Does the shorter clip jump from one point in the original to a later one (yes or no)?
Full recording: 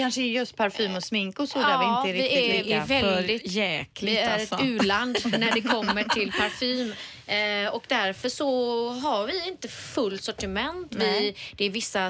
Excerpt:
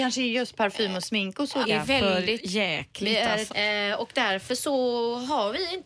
yes